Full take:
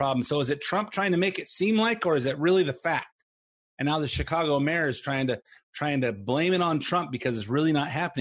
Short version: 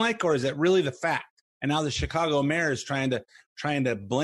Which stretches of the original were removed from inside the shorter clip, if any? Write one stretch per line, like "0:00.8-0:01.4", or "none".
0:03.3-0:03.7